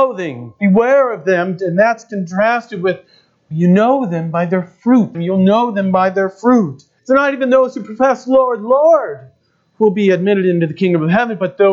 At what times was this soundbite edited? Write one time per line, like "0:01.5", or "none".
0:05.1
0:07.0